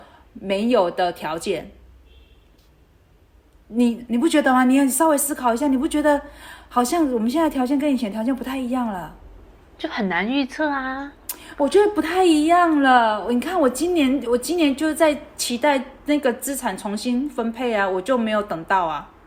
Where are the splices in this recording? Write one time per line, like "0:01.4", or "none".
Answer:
0:14.3